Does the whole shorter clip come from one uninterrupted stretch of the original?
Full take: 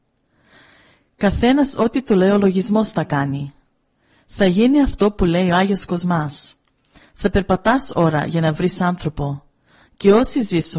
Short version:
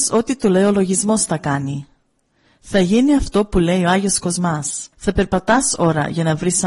no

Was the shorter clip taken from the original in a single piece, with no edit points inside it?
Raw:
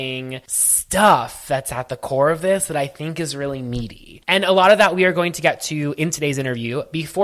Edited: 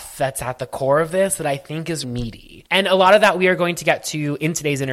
no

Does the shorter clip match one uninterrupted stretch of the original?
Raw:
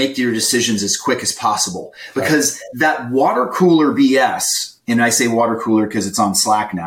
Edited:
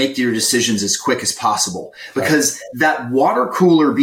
yes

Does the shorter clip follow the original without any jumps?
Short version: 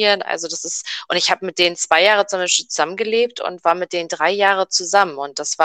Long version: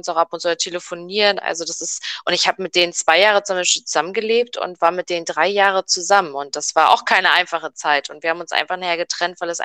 yes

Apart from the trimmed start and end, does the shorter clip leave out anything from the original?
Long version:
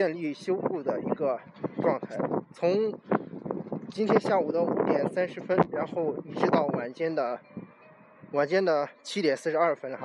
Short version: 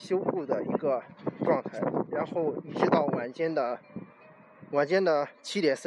yes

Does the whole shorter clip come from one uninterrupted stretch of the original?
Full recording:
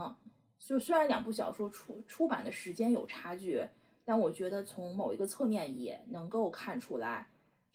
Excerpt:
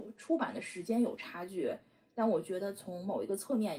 yes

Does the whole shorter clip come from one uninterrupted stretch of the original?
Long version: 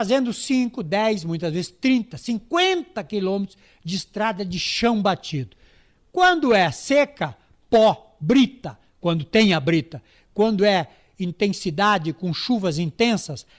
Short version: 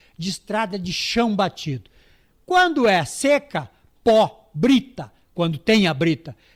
yes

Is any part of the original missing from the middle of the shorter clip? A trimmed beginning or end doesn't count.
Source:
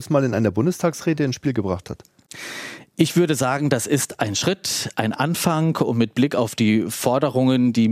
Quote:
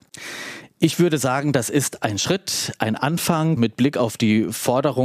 yes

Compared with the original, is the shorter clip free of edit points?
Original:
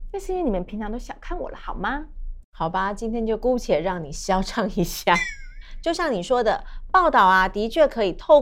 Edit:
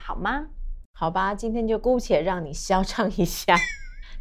yes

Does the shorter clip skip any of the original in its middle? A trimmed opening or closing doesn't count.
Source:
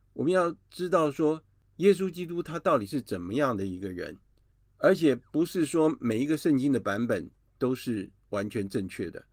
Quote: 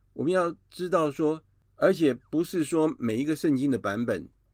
yes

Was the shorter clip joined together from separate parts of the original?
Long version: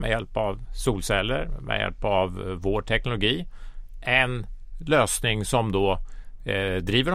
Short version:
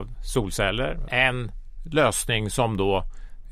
yes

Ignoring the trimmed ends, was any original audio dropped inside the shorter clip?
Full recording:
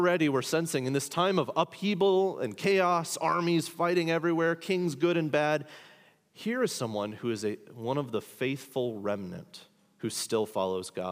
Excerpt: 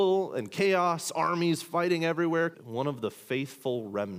yes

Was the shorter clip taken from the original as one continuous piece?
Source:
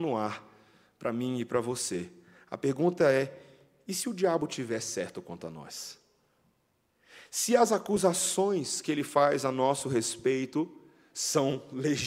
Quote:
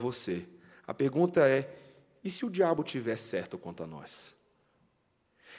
yes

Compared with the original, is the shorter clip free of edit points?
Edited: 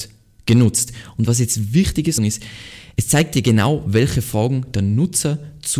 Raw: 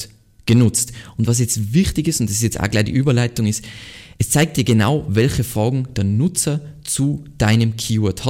no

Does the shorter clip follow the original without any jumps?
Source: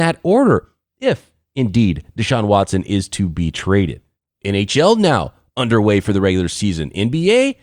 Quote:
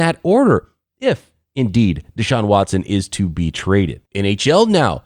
no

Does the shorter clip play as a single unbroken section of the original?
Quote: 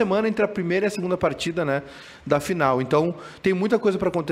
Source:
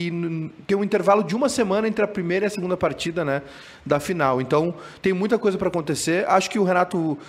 yes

